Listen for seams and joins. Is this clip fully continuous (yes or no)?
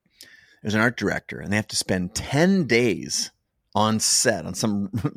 yes